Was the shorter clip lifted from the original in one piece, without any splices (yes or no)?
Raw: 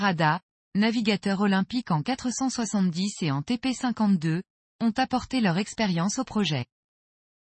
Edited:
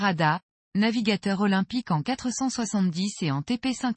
yes